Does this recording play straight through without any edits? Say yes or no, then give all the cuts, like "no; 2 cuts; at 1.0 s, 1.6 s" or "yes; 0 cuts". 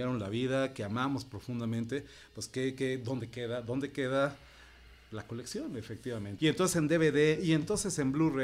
no; 1 cut; at 6.4 s